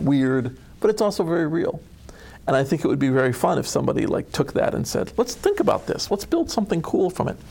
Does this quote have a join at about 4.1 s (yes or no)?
no